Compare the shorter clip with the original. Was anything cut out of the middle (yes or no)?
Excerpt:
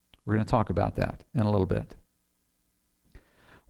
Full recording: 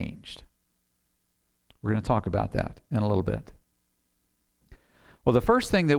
no